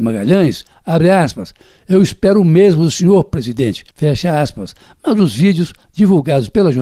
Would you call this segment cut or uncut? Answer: cut